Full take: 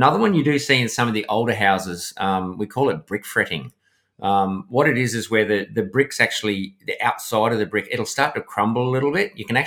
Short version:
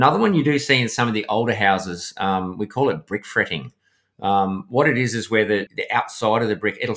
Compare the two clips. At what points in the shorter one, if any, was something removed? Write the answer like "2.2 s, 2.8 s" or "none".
5.7 s